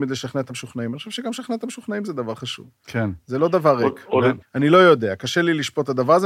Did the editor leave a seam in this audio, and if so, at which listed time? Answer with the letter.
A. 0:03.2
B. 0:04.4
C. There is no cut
B